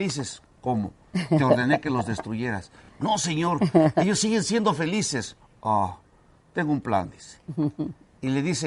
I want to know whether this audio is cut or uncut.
uncut